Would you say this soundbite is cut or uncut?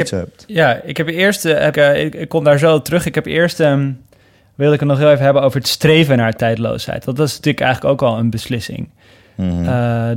cut